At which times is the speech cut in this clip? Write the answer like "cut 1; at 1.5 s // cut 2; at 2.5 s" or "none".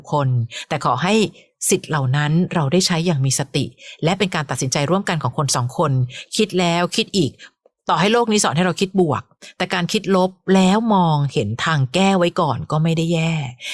none